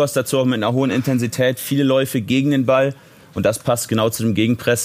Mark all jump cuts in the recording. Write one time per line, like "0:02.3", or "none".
none